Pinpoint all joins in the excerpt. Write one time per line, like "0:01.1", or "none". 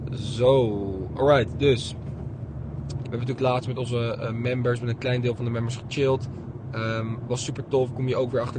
0:03.0